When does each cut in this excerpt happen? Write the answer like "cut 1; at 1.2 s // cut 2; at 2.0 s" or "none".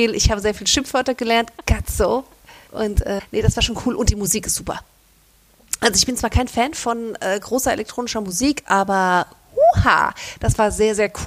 cut 1; at 2.7 s